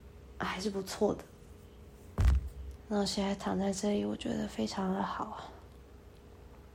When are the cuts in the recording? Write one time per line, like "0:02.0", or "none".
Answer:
0:02.8